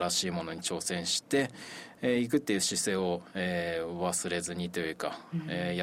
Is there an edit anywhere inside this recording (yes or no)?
no